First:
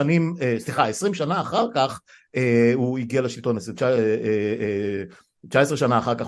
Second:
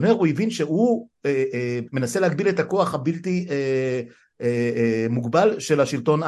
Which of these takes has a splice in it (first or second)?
second